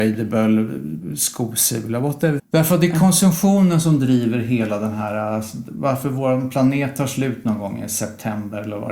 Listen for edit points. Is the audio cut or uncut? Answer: cut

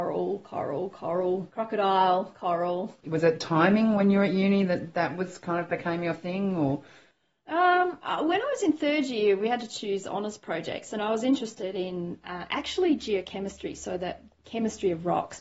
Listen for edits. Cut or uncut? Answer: cut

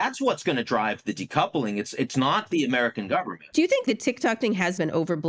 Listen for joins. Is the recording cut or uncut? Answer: uncut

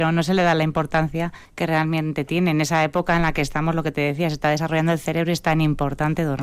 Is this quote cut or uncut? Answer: cut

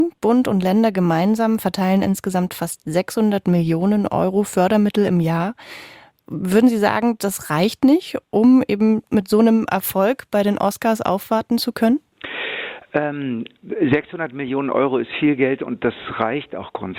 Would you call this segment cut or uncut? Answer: uncut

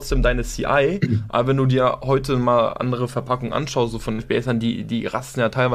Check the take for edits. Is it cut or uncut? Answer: uncut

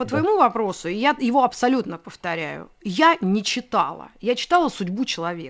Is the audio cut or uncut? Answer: uncut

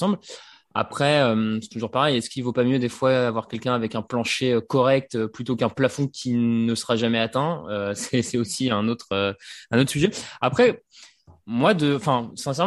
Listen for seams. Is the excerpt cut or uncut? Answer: uncut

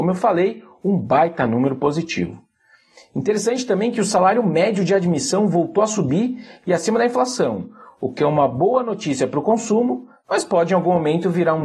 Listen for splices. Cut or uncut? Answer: uncut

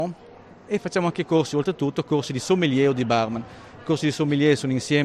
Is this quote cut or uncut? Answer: uncut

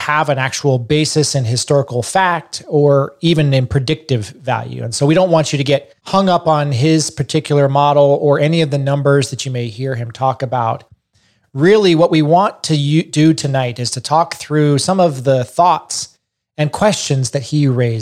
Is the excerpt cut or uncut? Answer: cut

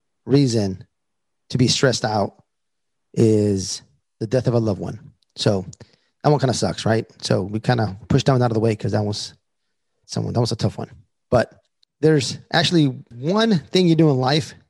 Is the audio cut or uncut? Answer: uncut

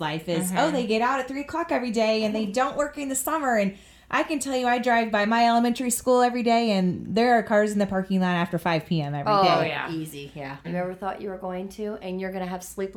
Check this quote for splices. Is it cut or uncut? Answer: cut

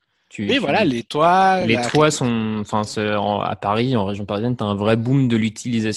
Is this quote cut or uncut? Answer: uncut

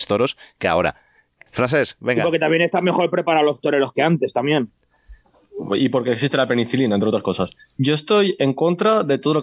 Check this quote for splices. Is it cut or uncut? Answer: cut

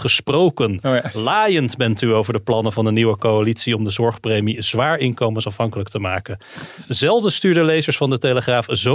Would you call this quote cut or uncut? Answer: uncut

